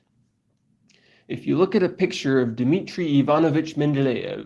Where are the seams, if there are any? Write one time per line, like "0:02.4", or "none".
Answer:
none